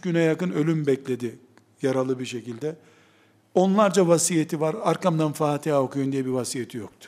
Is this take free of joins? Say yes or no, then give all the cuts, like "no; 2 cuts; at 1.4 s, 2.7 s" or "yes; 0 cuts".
yes; 0 cuts